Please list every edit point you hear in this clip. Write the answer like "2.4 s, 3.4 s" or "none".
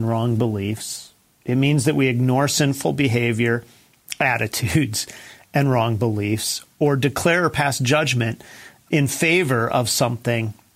none